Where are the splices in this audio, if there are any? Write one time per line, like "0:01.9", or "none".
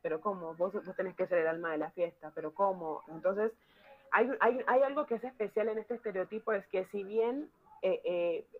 0:03.1

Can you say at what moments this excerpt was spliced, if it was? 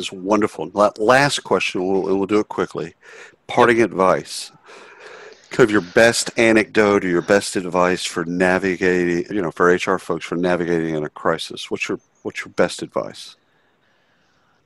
0:09.3

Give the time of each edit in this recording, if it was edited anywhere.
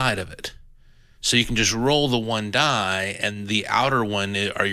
none

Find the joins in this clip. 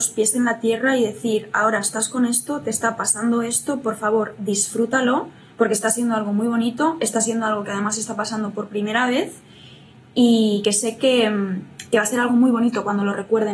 none

